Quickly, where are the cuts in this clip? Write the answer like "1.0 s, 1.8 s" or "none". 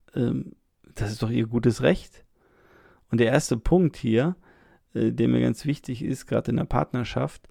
none